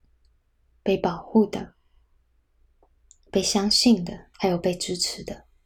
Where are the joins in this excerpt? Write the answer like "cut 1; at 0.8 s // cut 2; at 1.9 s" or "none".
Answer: cut 1; at 4.3 s